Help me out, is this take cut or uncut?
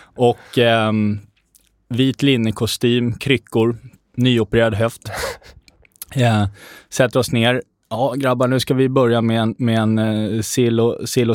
uncut